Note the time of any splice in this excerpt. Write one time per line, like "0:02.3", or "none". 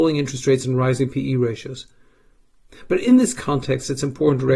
none